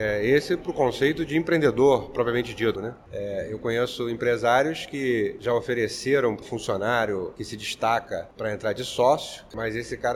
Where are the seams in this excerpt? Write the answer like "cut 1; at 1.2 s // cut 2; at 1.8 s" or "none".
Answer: cut 1; at 2.7 s // cut 2; at 6.4 s